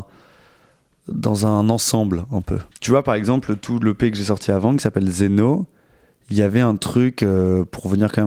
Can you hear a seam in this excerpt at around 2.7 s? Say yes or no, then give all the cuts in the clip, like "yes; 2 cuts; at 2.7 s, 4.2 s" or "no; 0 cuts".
yes; 1 cut; at 2.7 s